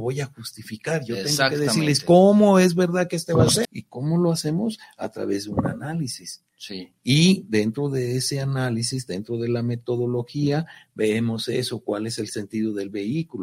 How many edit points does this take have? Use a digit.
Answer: 1